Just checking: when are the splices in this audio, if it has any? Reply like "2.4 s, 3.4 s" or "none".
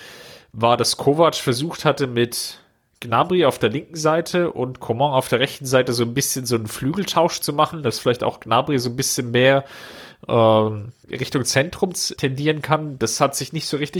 11.0 s, 12.2 s